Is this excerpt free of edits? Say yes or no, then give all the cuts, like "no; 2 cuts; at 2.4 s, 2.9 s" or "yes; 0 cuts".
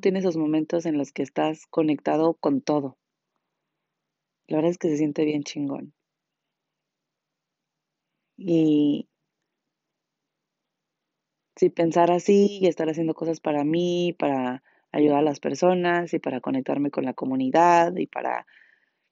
yes; 0 cuts